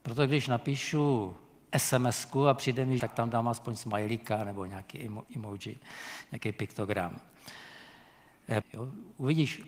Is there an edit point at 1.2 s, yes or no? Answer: no